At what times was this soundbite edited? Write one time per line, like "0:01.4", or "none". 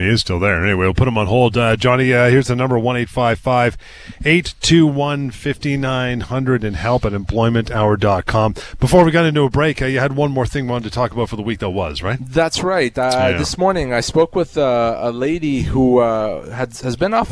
none